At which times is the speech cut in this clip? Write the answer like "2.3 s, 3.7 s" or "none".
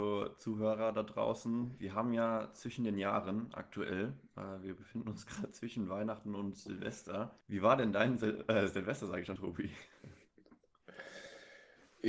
1.8 s, 7.4 s, 9.4 s

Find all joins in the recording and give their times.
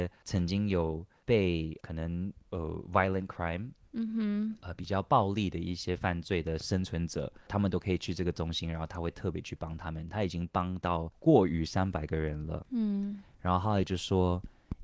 none

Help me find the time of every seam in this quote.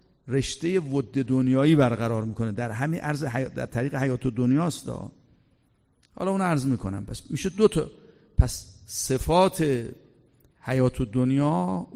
none

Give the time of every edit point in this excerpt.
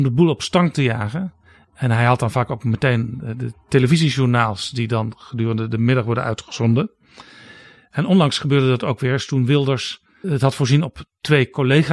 10.2 s

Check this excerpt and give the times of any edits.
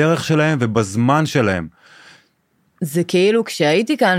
2.8 s

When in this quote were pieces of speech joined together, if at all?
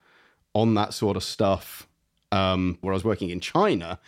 2.8 s

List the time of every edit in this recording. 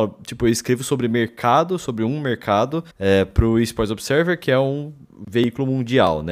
2.9 s

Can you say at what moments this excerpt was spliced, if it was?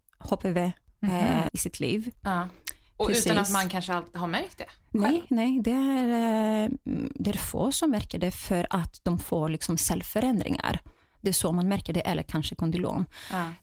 1.5 s, 5.3 s

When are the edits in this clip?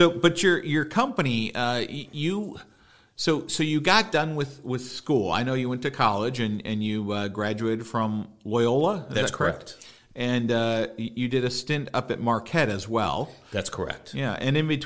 none

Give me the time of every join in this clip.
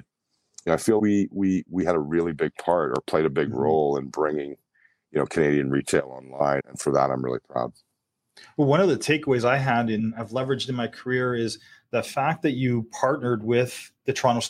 1.0 s, 6.6 s

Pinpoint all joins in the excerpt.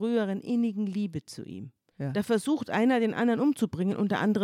1.9 s

